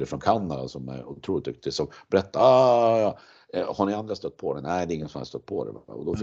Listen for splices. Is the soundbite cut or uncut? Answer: uncut